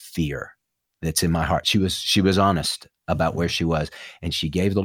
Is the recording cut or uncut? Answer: uncut